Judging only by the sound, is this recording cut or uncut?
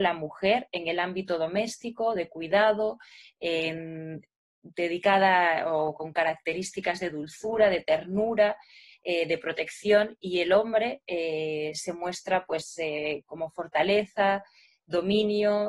uncut